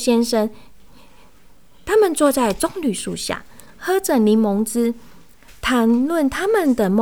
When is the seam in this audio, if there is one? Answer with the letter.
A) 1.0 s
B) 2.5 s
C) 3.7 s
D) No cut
D